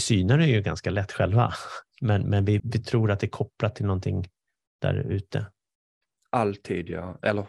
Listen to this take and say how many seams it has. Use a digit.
1